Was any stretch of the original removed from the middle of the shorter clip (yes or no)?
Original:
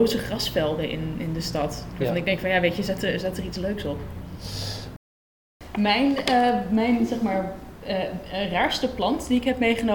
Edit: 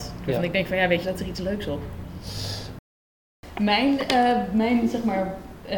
yes